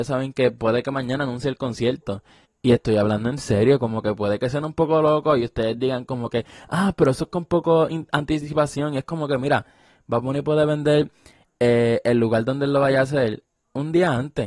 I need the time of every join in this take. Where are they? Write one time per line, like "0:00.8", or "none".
0:02.4

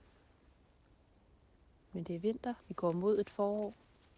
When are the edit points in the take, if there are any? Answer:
0:02.6

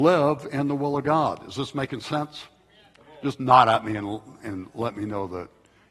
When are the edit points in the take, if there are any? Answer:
none

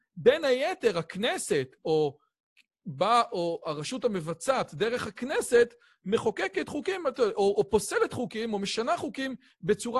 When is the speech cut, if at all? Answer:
none

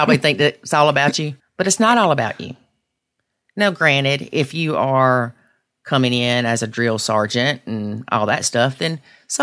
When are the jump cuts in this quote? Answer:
0:01.4

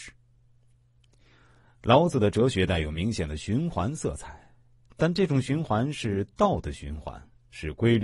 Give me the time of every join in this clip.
none

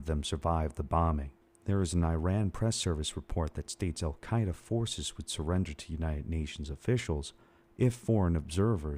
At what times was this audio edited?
0:01.5

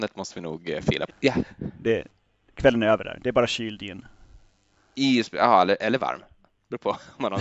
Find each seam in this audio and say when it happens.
0:01.1

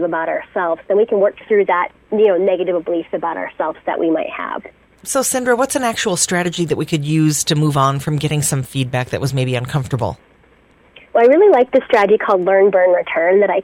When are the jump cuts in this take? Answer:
none

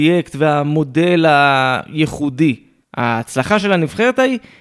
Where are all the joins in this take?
0:02.8

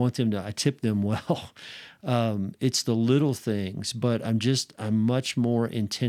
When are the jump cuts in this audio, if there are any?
none

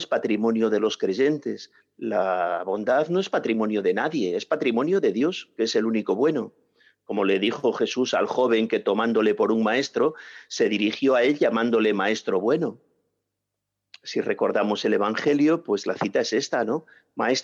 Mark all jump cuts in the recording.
none

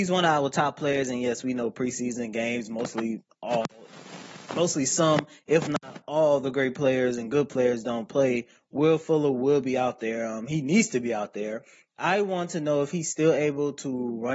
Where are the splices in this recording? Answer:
none

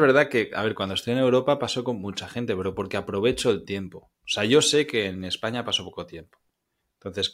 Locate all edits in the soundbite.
none

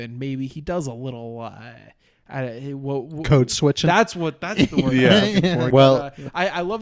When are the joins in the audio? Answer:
0:05.7

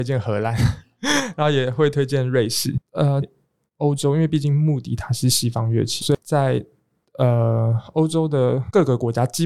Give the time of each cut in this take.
0:03.2
0:06.0

